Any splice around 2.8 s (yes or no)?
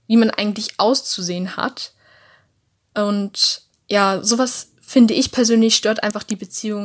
no